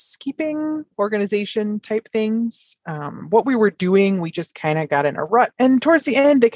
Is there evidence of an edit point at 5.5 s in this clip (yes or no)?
yes